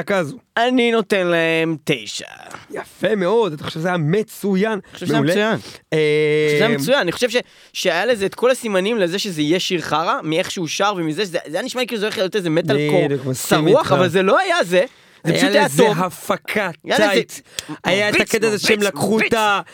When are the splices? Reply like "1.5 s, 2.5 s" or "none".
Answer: 2.6 s